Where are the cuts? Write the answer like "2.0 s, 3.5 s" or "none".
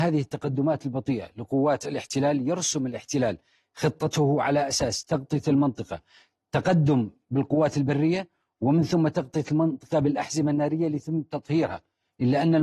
none